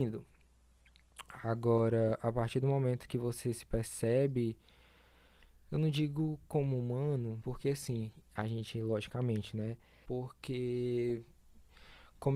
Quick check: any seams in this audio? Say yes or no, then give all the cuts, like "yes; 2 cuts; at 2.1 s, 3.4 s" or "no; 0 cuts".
yes; 2 cuts; at 7.4 s, 10.0 s